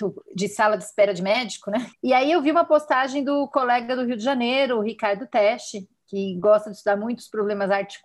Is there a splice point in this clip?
yes; 1 cut; at 1.9 s

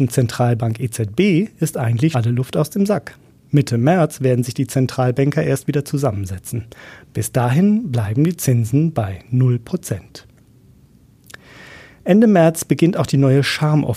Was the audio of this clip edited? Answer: yes; 1 cut; at 2.1 s

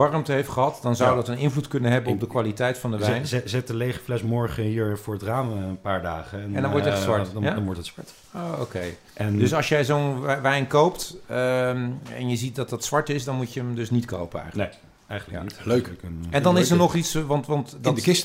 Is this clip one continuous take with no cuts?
yes; 0 cuts

